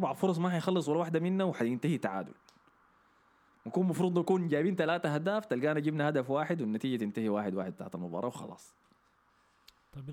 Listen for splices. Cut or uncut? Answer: uncut